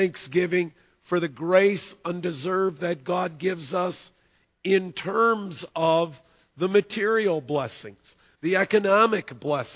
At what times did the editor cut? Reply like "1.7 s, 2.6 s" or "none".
8.4 s